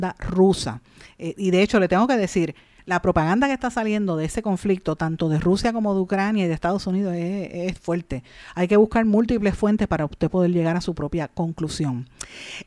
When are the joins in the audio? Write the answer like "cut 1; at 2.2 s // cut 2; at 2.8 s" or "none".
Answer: none